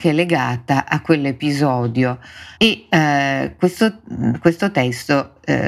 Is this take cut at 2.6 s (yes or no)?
yes